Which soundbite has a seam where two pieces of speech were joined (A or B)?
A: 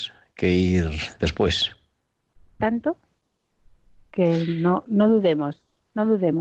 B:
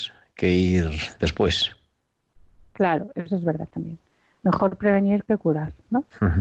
A